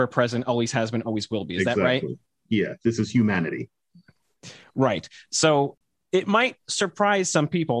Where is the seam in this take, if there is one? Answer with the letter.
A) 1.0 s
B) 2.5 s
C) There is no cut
B